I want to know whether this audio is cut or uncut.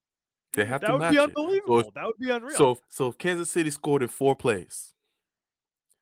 cut